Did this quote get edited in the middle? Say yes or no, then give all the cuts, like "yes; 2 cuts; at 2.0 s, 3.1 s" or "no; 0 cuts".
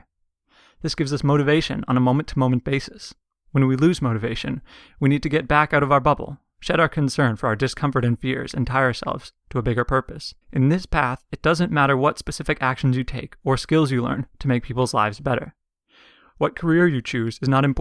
yes; 1 cut; at 10.4 s